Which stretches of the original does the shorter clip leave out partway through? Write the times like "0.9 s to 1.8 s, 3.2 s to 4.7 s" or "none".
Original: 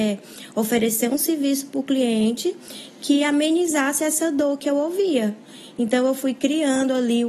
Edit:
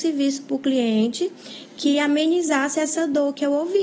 none